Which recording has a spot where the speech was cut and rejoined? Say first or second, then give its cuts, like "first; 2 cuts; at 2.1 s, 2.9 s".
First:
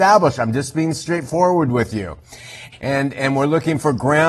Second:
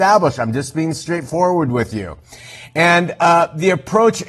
first; 1 cut; at 2.7 s